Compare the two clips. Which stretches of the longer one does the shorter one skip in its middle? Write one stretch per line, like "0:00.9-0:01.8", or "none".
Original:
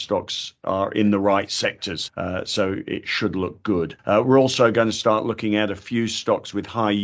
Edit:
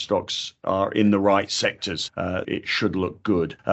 0:02.4-0:02.8